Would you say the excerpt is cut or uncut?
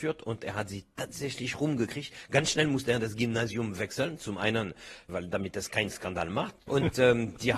cut